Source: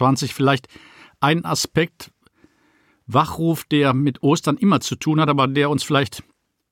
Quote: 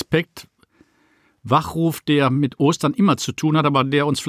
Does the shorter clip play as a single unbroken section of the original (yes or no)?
yes